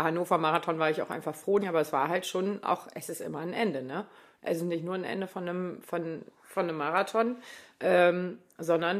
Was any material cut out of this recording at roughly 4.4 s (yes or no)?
no